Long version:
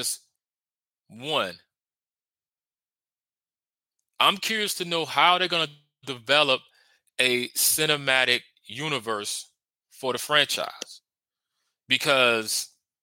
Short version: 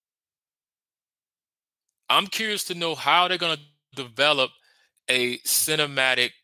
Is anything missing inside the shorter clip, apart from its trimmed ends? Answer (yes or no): no